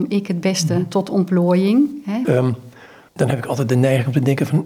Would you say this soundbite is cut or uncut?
cut